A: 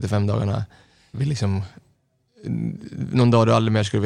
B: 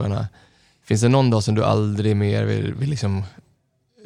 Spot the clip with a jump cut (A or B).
A